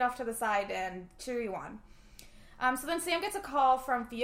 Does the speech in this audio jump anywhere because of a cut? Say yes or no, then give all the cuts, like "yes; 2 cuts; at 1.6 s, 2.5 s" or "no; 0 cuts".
no; 0 cuts